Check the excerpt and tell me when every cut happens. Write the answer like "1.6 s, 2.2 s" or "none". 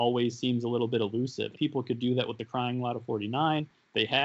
1.5 s